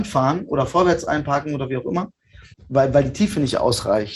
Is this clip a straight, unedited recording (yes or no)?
no